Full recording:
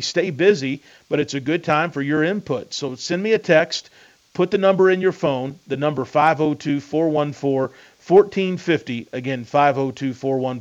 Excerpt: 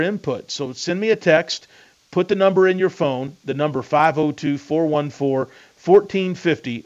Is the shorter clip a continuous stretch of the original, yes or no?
yes